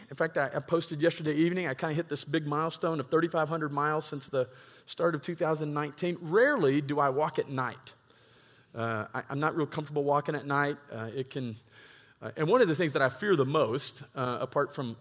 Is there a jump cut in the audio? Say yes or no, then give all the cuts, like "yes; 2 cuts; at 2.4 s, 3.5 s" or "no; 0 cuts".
no; 0 cuts